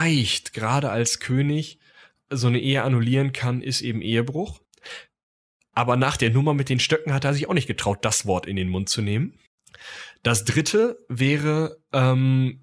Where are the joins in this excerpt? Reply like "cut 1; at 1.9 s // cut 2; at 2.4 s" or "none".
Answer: none